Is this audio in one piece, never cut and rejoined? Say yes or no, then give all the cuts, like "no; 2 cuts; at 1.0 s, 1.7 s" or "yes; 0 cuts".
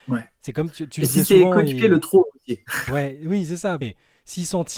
no; 1 cut; at 3.8 s